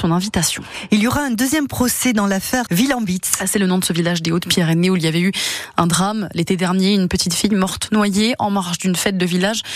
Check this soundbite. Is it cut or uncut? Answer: cut